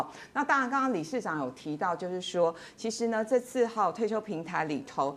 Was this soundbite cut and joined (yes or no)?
no